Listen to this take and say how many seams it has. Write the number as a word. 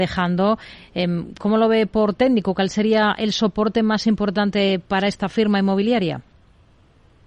zero